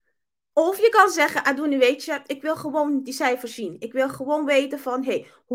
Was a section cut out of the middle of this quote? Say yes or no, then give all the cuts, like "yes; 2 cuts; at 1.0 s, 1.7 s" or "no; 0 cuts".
no; 0 cuts